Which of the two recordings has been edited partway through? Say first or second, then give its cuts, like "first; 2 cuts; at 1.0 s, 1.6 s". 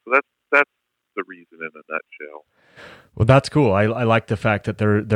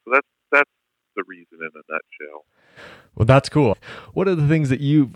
second; 1 cut; at 3.7 s